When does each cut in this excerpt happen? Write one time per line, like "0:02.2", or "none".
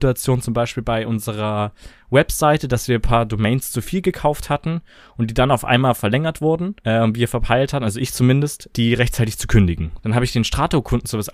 0:06.8
0:08.7
0:10.0